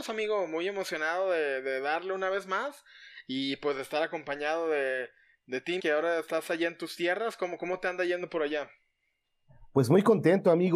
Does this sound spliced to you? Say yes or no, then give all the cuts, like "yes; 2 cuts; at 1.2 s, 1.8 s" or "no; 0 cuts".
yes; 1 cut; at 5.8 s